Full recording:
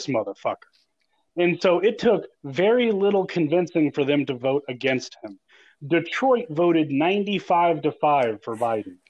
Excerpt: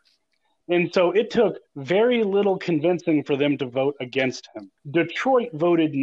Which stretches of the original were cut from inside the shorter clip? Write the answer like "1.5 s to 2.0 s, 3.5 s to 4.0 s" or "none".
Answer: 5.5 s to 5.7 s